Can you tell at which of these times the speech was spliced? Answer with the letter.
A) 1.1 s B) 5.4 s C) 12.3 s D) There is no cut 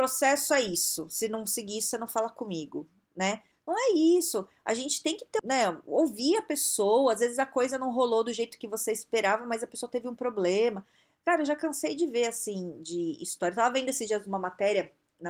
B